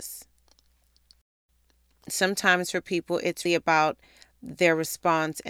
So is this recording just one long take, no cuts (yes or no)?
no